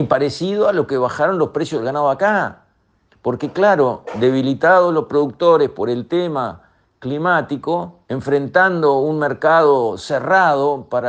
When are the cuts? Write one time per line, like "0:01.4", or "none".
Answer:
0:03.1
0:08.0